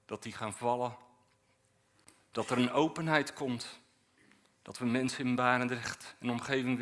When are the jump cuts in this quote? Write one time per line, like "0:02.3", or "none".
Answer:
none